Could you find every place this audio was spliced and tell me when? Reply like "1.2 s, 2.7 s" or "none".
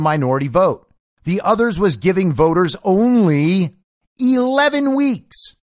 none